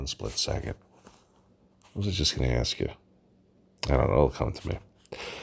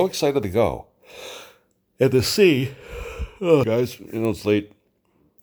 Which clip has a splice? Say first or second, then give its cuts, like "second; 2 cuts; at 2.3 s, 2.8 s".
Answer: second; 1 cut; at 3.6 s